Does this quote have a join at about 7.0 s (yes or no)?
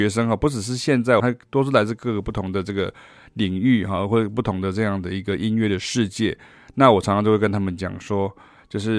no